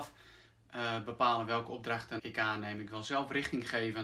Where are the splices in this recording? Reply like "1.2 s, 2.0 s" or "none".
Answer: 2.2 s